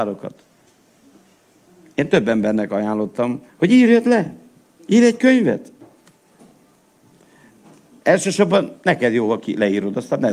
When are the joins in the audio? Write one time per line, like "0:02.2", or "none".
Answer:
0:03.5